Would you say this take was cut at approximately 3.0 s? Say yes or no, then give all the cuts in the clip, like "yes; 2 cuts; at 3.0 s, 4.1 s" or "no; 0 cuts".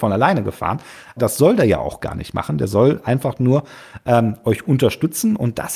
no; 1 cut; at 1.2 s